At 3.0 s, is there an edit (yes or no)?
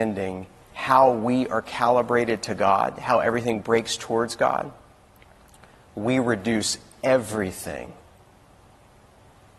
no